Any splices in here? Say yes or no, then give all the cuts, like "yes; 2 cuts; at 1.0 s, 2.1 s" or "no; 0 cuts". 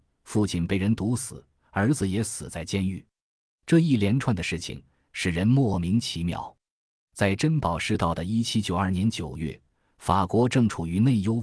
no; 0 cuts